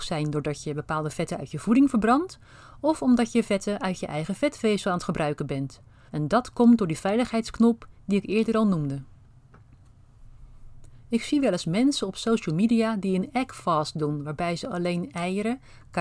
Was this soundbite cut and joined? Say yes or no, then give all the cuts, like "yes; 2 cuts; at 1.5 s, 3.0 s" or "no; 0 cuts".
yes; 1 cut; at 6.1 s